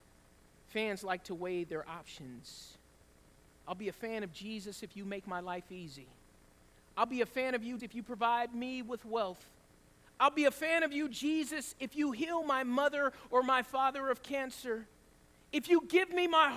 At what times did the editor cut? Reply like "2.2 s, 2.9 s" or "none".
7.8 s